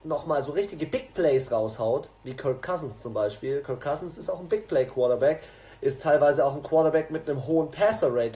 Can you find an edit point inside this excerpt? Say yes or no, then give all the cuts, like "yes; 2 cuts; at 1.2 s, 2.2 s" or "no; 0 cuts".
no; 0 cuts